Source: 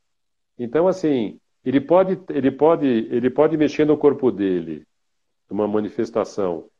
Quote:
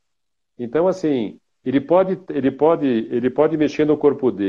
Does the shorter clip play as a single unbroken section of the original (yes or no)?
yes